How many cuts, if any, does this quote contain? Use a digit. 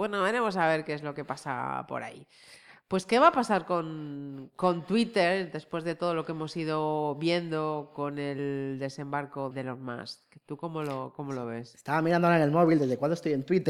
1